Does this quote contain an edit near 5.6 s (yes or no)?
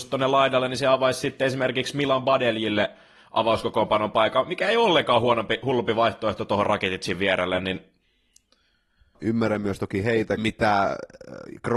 no